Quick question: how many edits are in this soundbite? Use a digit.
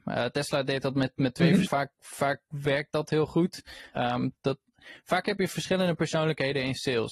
2